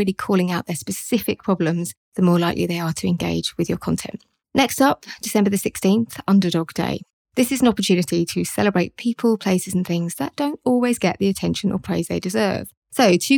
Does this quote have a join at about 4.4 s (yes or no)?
no